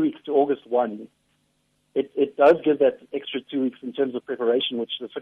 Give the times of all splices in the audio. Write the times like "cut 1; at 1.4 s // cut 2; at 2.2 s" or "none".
none